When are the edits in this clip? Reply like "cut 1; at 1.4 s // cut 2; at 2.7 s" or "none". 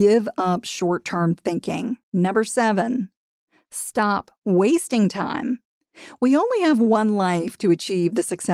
cut 1; at 2.0 s